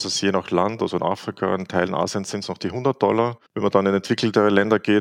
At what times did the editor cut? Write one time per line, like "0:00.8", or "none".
0:03.5